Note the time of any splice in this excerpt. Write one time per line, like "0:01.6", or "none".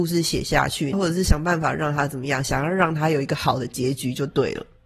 0:00.9

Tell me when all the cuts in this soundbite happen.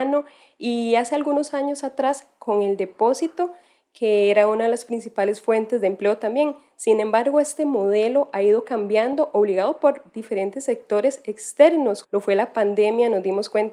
0:12.0

